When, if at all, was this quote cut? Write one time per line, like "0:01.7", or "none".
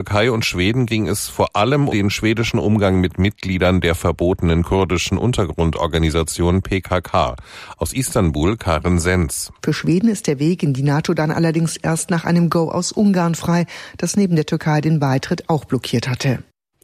0:01.9
0:09.6